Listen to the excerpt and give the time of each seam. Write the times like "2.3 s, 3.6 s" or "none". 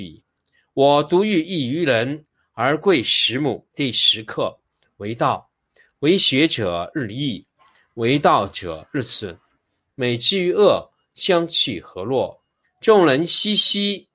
3.7 s, 9.9 s, 12.6 s